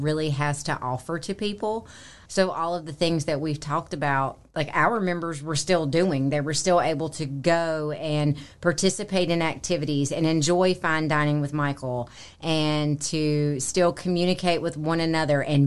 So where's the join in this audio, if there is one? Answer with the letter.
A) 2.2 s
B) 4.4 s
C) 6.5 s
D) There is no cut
A